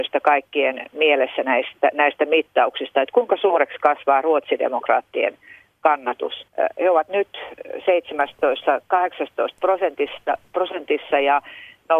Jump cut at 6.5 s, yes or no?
yes